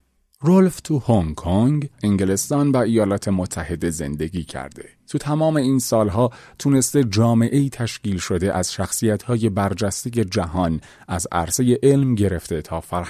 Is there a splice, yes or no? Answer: yes